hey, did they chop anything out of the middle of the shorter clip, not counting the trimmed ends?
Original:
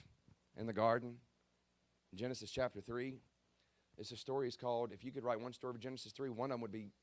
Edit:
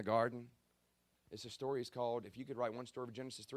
yes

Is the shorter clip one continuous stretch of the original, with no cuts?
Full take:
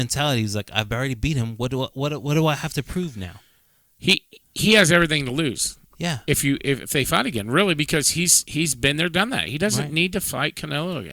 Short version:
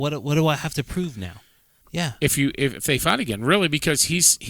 no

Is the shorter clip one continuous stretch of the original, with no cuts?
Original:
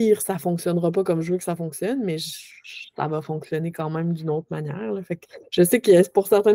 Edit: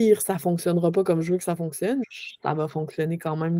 no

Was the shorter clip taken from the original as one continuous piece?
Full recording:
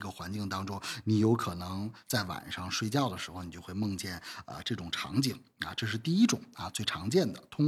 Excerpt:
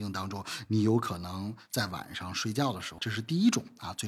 no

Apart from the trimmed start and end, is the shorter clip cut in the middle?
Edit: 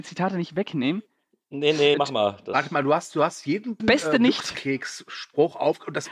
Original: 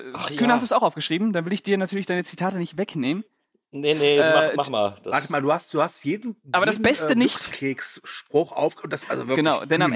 yes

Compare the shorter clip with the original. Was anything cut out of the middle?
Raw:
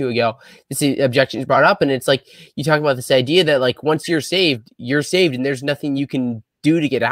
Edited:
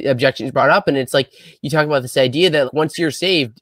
yes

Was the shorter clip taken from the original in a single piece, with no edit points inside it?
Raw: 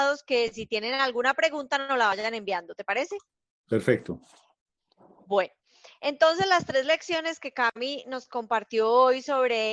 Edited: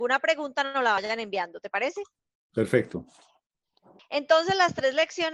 no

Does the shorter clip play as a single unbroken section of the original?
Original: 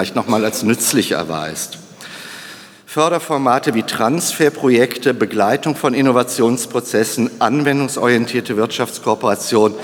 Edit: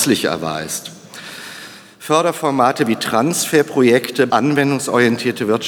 no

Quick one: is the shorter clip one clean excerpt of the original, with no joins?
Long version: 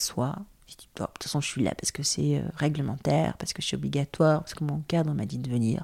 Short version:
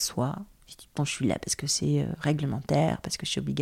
no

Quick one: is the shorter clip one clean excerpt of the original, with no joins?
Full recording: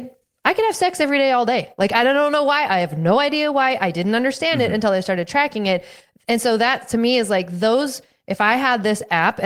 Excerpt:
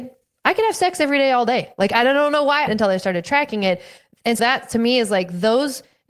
no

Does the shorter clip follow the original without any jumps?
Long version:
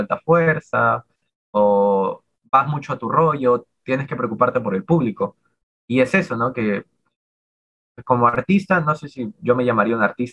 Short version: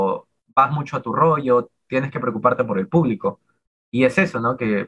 yes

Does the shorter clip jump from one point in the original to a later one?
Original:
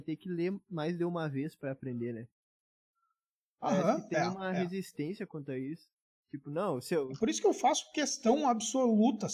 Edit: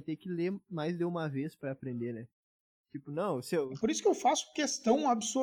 yes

